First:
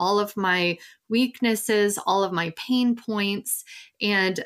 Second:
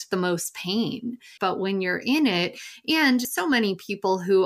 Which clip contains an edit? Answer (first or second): second